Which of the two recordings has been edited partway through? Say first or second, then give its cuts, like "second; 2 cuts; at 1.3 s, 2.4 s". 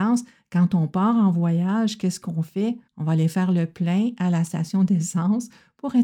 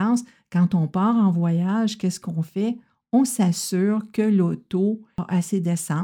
first; 1 cut; at 2.9 s